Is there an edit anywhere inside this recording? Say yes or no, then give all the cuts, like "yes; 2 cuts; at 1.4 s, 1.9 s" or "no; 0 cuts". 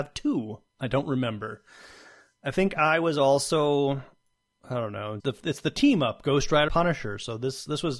yes; 2 cuts; at 5.2 s, 6.7 s